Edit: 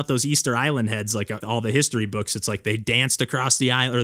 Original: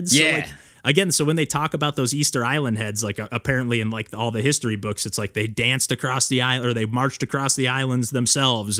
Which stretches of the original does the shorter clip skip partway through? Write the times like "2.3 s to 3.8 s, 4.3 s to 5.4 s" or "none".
3.3 s to 4.1 s